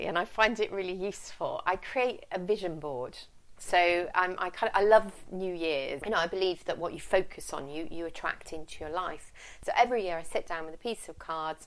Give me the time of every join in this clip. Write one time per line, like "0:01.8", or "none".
0:06.0